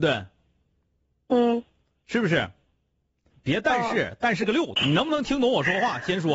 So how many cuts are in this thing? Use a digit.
2